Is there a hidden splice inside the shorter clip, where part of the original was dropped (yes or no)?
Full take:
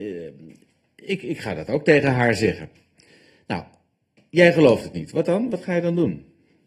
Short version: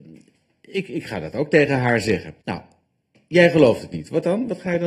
yes